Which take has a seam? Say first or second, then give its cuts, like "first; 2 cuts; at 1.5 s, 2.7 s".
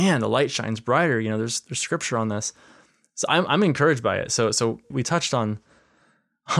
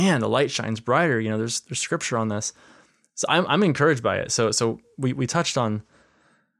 first; 1 cut; at 4.9 s